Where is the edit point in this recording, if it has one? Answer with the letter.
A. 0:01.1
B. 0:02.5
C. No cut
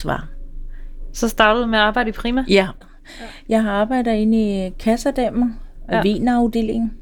A